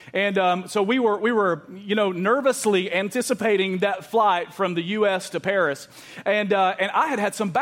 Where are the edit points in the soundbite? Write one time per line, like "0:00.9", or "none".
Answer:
none